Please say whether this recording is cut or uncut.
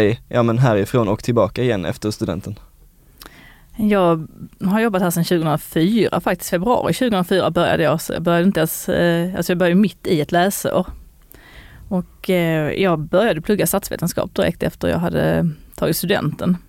uncut